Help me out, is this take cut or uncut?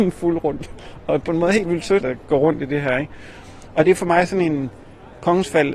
cut